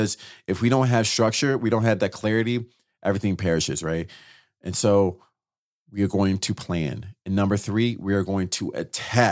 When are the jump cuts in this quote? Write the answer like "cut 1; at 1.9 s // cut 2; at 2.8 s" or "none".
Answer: none